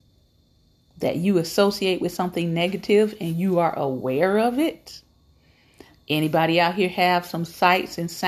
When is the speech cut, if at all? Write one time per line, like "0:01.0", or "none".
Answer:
none